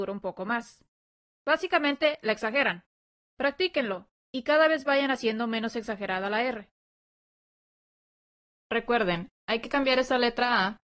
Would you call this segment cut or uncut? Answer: uncut